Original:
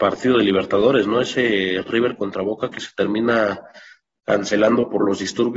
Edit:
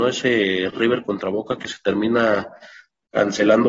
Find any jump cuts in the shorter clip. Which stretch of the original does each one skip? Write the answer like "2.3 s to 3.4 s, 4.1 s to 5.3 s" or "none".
none